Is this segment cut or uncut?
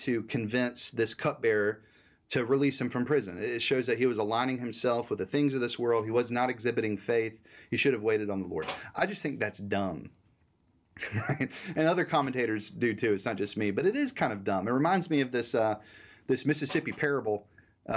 uncut